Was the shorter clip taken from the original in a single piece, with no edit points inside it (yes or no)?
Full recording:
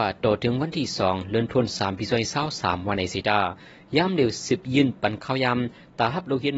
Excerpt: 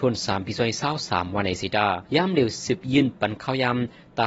no